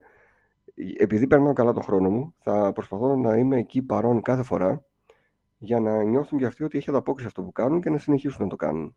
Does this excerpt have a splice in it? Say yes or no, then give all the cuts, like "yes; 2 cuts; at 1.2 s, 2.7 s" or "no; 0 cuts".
no; 0 cuts